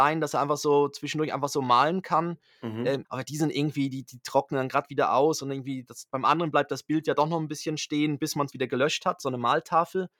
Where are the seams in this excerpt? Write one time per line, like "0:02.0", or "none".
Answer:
0:03.0
0:08.5